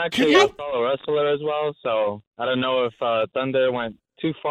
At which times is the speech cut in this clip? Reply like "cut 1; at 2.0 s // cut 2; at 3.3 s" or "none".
none